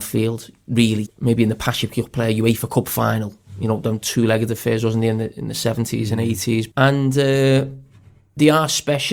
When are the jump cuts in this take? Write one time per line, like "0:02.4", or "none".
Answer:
0:01.1
0:06.7